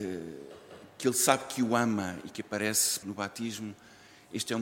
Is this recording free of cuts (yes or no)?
no